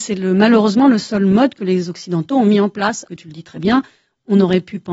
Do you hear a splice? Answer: yes; 1 cut; at 3.1 s

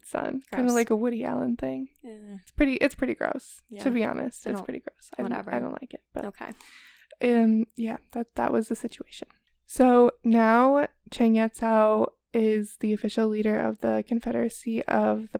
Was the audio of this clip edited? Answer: no; 0 cuts

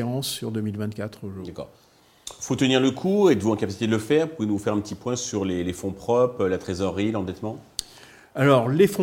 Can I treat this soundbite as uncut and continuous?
yes; 0 cuts

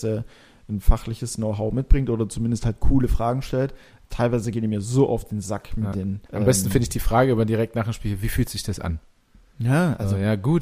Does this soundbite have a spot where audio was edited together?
yes; 1 cut; at 6.2 s

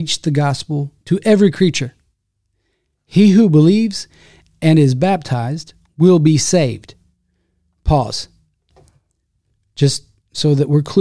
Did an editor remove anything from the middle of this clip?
no; 0 cuts

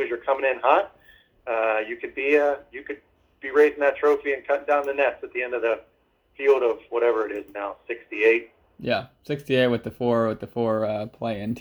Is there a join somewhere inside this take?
no; 0 cuts

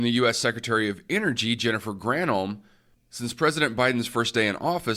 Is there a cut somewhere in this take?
no; 0 cuts

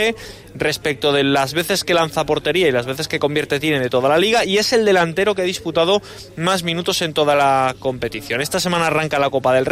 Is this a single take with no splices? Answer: yes; 0 cuts

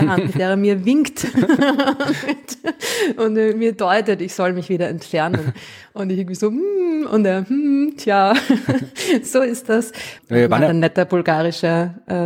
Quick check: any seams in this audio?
yes; 1 cut; at 10.2 s

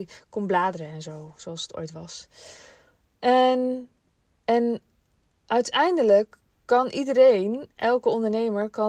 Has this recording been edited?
no; 0 cuts

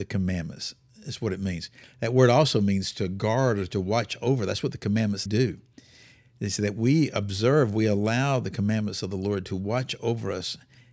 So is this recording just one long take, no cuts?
no; 1 cut; at 5.3 s

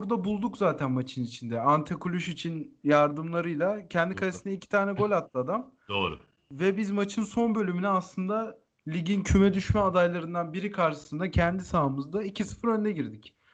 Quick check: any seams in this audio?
no; 0 cuts

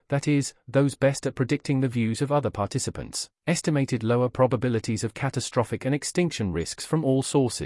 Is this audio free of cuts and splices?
yes; 0 cuts

